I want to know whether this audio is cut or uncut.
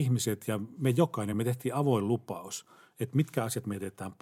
cut